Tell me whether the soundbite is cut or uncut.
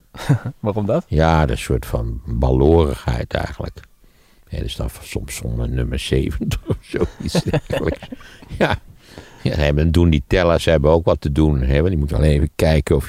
uncut